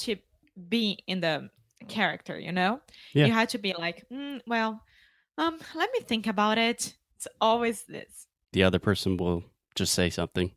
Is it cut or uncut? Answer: cut